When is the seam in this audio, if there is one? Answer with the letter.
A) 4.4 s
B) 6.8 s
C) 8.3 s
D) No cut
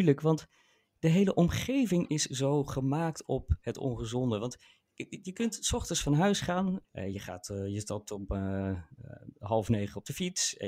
B